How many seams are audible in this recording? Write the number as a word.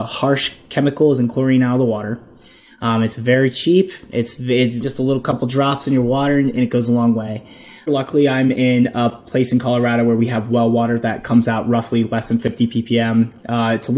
two